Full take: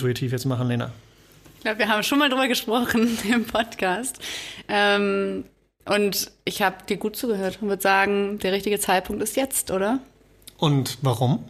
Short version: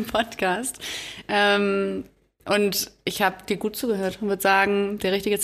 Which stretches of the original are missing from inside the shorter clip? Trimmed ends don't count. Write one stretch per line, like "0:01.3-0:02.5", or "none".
none